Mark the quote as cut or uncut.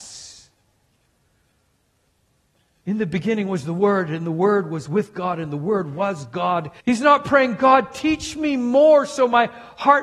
cut